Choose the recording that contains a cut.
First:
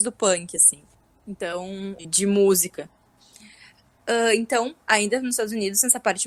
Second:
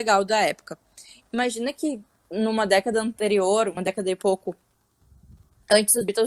first; 1 cut; at 2.0 s

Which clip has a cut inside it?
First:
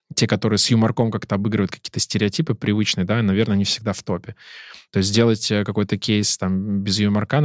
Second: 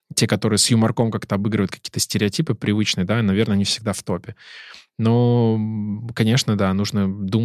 second; 1 cut; at 4.9 s

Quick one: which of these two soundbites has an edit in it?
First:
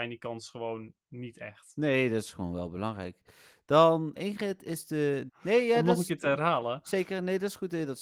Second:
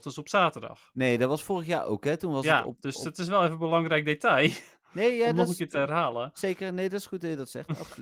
first; 2 cuts; at 4.2 s, 5.3 s

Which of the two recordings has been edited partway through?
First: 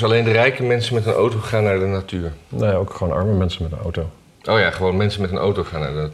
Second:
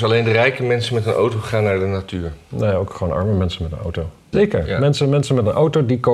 second; 1 cut; at 4.3 s

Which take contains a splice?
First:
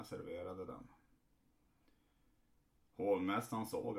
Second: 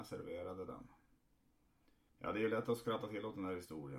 second; 1 cut; at 2.1 s

